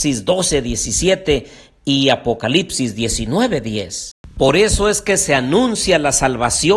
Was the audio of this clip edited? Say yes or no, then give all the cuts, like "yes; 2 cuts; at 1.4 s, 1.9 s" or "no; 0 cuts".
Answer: no; 0 cuts